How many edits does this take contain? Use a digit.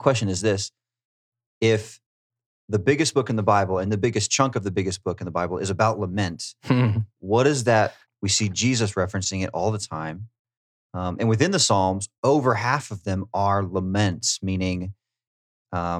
1